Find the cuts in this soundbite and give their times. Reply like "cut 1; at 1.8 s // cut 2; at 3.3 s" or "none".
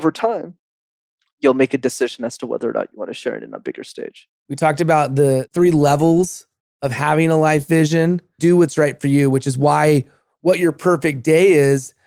cut 1; at 4.4 s // cut 2; at 8.4 s